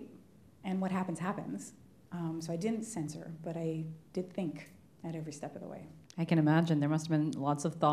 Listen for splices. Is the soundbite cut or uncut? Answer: cut